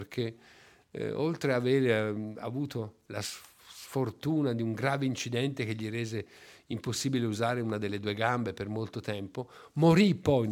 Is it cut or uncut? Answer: uncut